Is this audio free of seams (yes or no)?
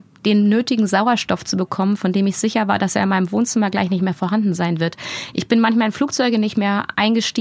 yes